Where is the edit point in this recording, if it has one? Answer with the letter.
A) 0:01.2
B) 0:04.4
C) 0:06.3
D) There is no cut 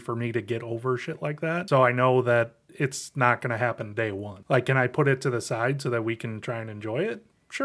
D